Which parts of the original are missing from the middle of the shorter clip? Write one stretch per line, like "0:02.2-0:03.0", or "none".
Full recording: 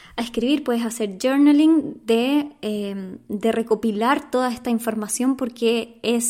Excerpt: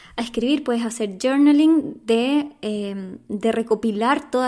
none